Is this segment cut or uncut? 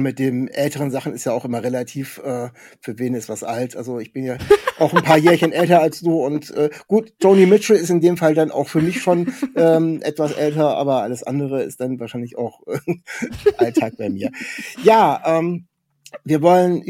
uncut